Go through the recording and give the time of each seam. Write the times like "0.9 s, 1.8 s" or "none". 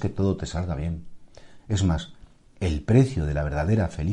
1.6 s